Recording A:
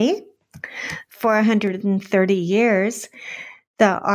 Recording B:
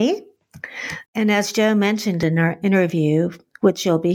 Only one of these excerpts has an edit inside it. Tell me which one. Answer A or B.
B